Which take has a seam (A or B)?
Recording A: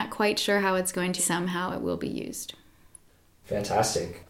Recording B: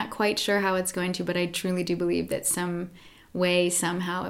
A